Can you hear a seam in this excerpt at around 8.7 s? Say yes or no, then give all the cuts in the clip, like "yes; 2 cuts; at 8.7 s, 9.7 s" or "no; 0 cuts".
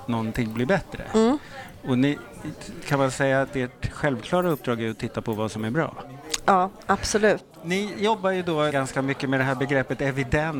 yes; 2 cuts; at 7.5 s, 8.7 s